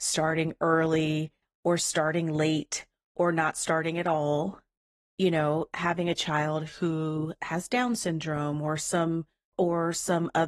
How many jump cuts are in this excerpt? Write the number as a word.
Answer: one